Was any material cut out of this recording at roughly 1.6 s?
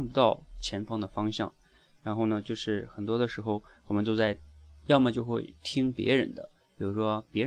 no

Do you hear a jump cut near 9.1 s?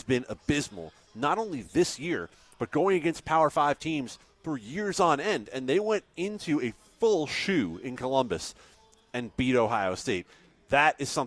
no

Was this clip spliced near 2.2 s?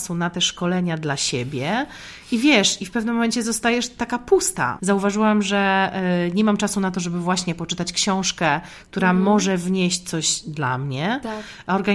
no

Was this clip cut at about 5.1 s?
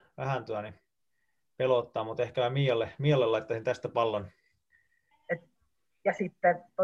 yes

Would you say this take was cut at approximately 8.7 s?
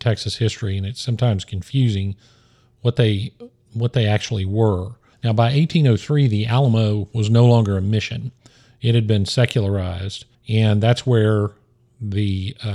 no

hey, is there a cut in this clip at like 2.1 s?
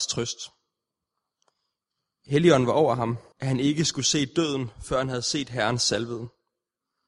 no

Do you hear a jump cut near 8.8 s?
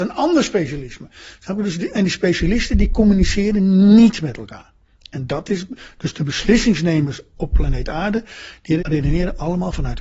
yes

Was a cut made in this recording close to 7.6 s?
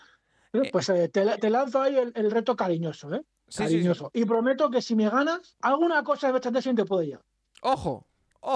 no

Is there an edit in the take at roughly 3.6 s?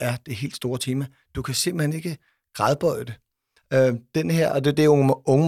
yes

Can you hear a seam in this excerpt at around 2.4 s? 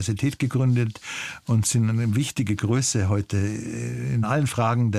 no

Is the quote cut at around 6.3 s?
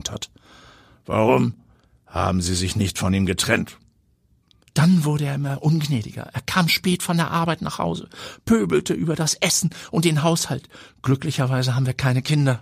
no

